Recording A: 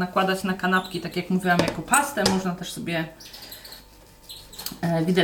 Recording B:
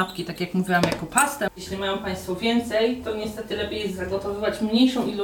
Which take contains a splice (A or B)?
B